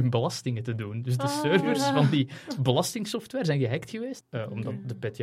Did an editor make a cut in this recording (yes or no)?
yes